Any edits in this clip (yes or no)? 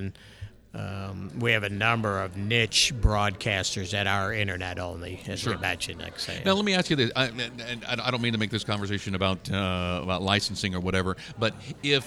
no